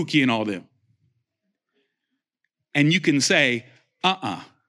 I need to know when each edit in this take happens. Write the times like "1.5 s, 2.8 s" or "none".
none